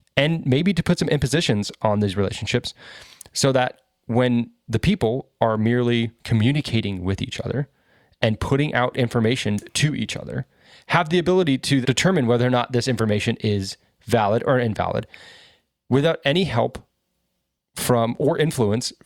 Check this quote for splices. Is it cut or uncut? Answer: cut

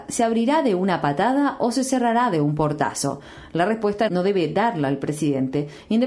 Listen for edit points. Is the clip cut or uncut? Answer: uncut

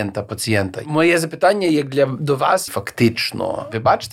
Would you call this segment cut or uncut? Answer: cut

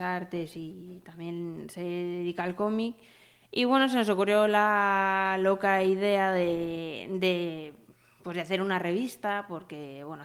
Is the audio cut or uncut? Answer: uncut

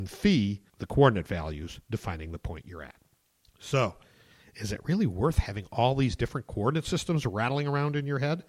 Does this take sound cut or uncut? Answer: uncut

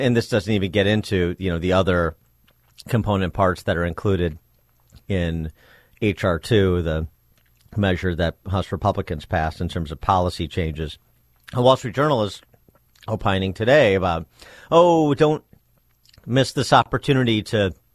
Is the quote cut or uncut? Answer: uncut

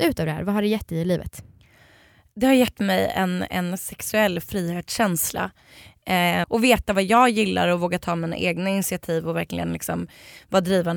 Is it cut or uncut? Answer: cut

